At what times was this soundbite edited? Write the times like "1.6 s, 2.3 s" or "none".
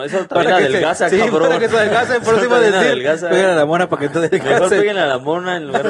none

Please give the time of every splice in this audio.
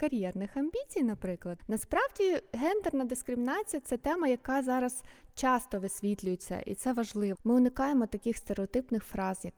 1.6 s, 7.4 s

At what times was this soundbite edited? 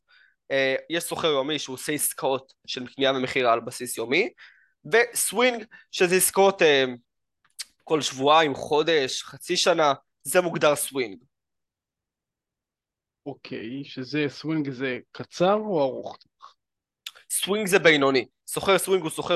none

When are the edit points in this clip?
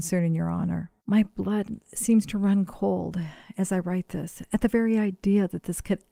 1.0 s

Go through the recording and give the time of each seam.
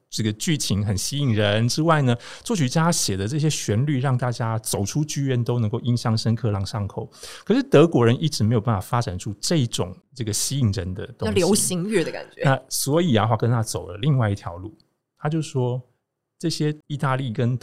6.5 s

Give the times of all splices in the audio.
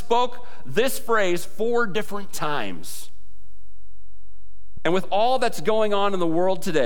4.8 s

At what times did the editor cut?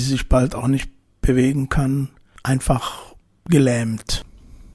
none

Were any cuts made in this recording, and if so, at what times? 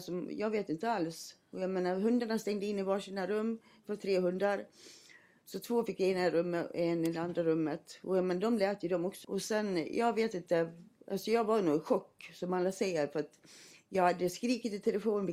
9.2 s

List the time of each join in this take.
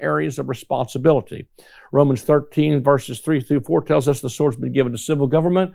none

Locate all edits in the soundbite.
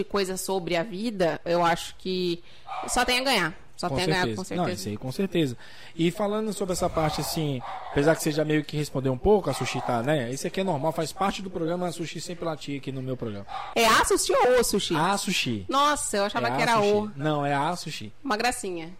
13.7 s

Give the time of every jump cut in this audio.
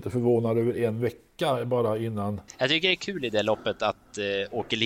2.5 s

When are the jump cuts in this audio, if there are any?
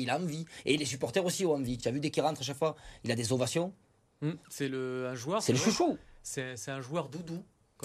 none

